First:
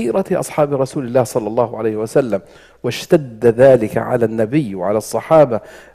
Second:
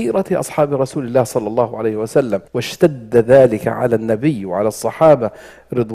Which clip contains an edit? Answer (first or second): second